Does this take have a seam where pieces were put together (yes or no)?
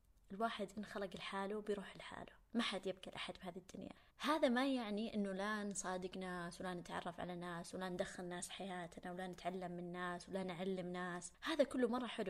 yes